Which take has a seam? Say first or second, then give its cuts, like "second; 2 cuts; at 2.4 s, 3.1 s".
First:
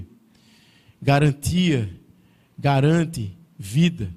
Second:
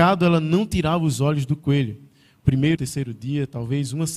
second; 1 cut; at 2.8 s